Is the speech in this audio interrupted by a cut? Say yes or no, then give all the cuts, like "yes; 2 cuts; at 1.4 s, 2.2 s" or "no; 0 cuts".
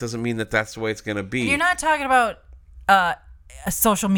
no; 0 cuts